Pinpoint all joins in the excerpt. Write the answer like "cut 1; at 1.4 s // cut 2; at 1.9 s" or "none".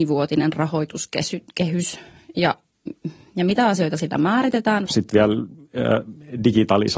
cut 1; at 4.9 s